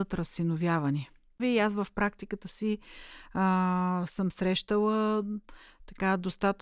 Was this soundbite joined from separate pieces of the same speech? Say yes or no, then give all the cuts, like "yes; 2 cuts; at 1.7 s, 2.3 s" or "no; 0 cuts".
yes; 1 cut; at 1.4 s